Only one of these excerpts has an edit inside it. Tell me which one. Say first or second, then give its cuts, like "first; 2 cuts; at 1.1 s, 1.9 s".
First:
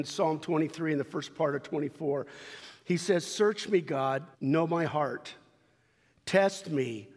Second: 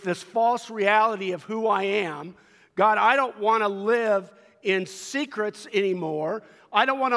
first; 1 cut; at 4.3 s